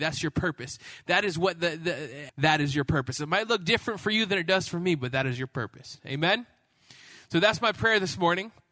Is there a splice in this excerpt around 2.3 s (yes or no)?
yes